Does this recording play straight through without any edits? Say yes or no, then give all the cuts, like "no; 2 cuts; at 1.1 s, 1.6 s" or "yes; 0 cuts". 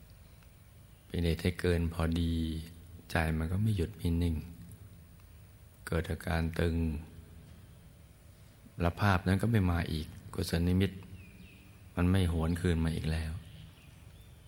yes; 0 cuts